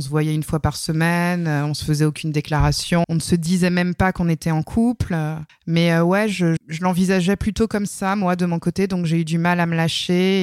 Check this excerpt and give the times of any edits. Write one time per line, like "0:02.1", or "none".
0:03.0
0:05.5
0:06.6